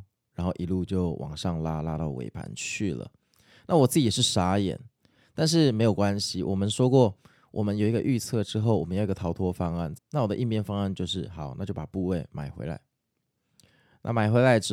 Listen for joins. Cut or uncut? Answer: cut